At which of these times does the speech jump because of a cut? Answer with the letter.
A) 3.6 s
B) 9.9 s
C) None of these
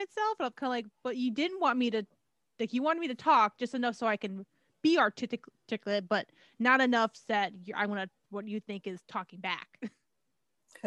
C